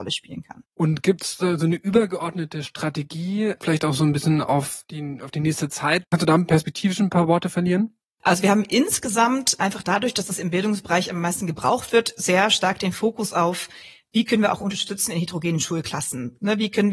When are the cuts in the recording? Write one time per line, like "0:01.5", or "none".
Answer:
none